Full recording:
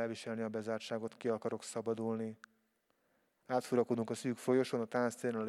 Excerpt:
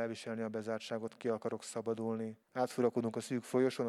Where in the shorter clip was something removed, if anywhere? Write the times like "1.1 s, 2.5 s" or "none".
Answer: 2.4 s